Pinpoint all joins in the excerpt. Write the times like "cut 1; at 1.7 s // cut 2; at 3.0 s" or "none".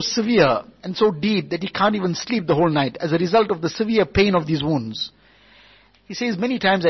cut 1; at 5.9 s